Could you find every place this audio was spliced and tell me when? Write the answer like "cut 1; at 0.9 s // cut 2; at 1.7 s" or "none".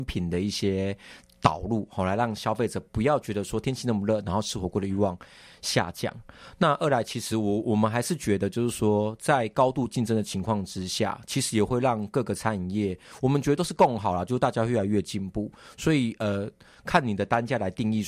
none